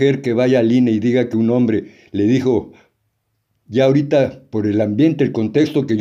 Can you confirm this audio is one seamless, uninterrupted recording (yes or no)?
no